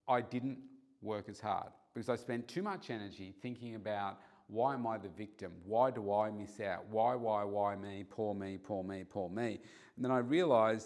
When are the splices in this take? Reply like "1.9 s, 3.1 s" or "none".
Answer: none